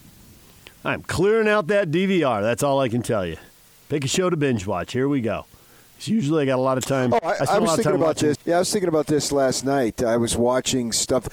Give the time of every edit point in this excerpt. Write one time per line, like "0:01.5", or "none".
0:08.3